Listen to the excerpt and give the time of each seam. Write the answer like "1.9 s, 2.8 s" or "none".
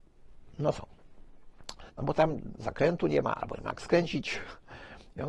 1.9 s